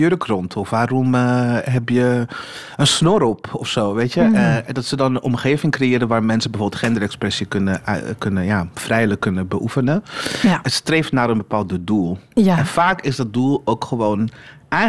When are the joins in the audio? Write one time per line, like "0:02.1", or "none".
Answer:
none